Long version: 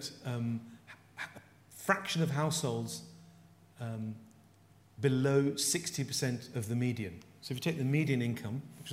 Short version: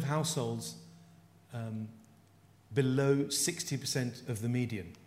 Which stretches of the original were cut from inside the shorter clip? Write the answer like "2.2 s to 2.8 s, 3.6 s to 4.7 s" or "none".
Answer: none